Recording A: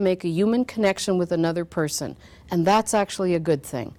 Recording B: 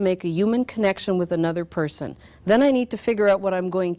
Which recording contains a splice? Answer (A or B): B